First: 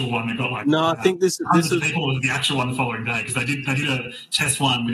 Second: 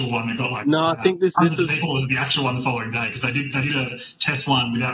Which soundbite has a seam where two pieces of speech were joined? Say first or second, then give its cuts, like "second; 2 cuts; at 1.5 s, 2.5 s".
second; 1 cut; at 1.4 s